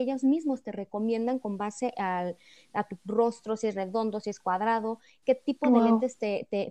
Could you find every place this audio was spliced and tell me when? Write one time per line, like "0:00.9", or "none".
none